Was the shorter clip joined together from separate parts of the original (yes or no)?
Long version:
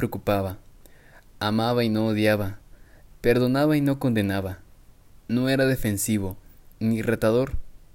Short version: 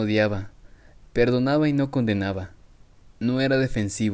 no